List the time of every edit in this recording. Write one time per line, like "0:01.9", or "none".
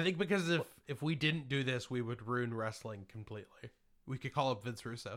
0:04.0